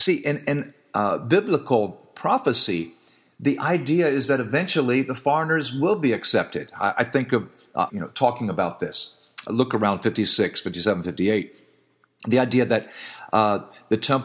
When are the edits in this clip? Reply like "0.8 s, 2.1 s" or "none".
7.9 s

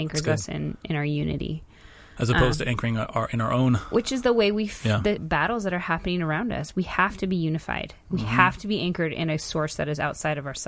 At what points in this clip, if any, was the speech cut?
5.2 s

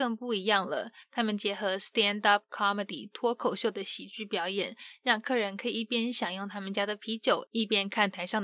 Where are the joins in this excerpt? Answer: none

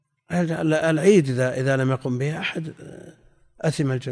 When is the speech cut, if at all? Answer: none

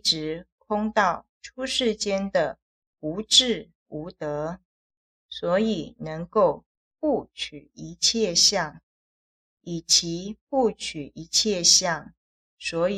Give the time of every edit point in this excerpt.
5.1 s

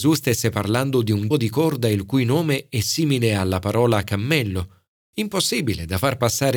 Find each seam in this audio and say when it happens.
1.3 s

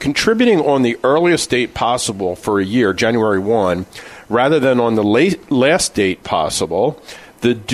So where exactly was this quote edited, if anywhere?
none

